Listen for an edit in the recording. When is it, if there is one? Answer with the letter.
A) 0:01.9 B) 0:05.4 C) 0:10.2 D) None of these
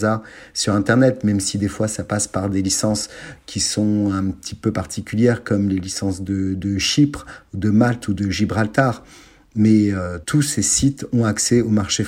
C